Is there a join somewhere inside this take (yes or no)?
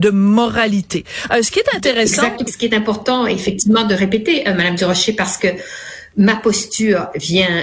yes